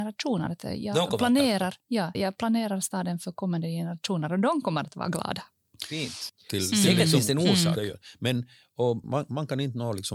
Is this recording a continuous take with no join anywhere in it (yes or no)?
no